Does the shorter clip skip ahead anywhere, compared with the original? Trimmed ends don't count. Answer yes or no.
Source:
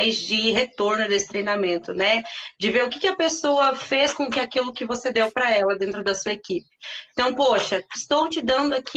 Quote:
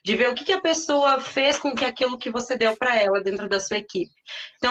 no